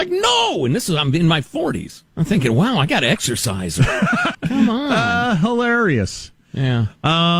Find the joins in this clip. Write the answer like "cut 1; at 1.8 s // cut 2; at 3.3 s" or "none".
cut 1; at 2.1 s // cut 2; at 4.3 s